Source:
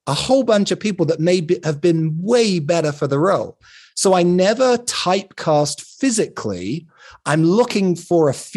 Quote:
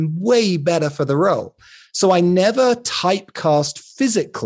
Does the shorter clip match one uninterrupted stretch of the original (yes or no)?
yes